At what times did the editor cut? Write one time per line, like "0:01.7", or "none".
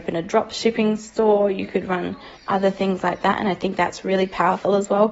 0:02.4